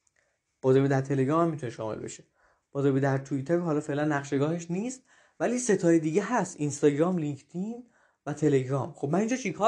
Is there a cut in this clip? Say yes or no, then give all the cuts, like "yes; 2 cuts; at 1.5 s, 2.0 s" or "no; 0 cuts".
no; 0 cuts